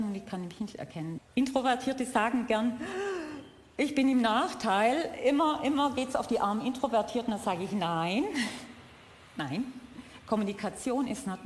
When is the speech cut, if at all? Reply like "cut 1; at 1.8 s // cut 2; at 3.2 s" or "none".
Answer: cut 1; at 1.2 s